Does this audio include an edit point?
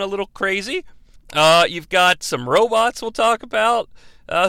yes; 1 cut; at 1.2 s

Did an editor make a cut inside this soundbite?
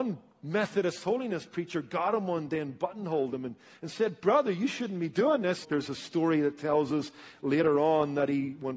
yes; 1 cut; at 5.6 s

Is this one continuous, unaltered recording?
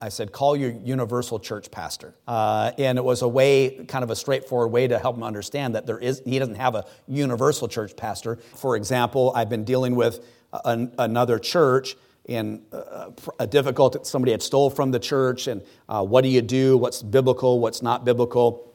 no; 2 cuts; at 2.2 s, 8.5 s

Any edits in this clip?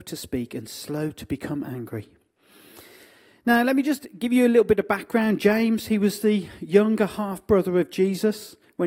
no; 0 cuts

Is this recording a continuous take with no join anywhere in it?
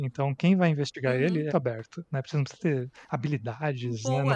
no; 1 cut; at 1.5 s

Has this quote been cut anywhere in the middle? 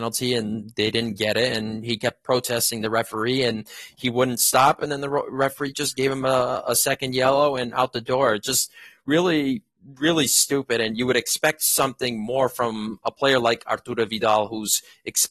no; 0 cuts

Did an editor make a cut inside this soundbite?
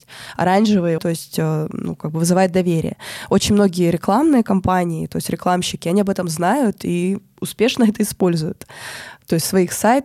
yes; 1 cut; at 1.0 s

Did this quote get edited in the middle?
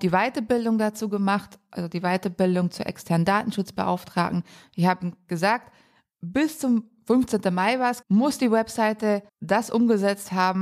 yes; 2 cuts; at 8.0 s, 9.3 s

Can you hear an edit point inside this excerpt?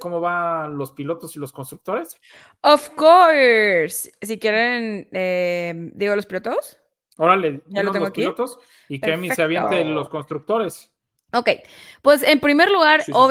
no; 0 cuts

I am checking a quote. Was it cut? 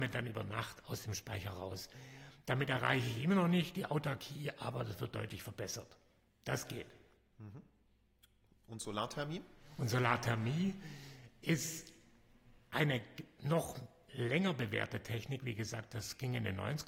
no; 0 cuts

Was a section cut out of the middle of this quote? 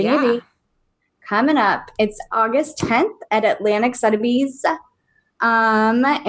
no; 0 cuts

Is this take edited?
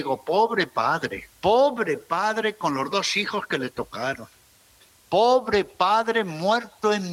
yes; 1 cut; at 1.3 s

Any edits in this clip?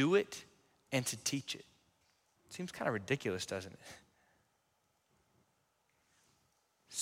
yes; 1 cut; at 2.3 s

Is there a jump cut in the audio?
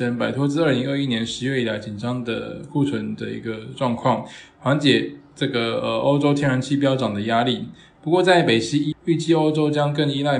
yes; 1 cut; at 8.9 s

